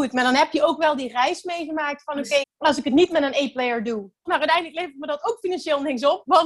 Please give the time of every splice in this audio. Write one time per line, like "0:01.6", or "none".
0:02.4
0:04.3